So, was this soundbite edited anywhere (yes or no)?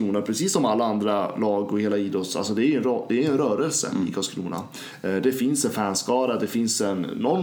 no